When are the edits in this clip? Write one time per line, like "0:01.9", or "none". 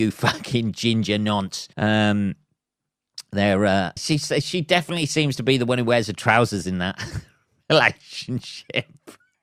0:01.7
0:04.0